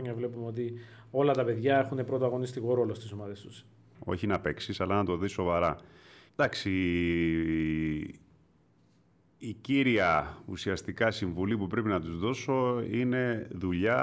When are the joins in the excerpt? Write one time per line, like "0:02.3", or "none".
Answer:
0:03.9
0:06.3